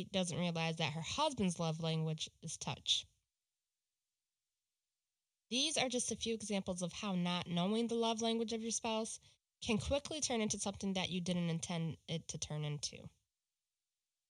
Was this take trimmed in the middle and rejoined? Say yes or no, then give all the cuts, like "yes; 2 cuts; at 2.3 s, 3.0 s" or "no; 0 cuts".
no; 0 cuts